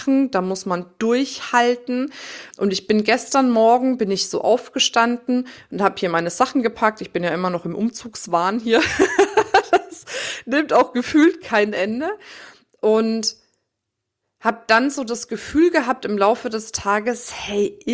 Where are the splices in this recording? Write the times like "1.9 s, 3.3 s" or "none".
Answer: 2.5 s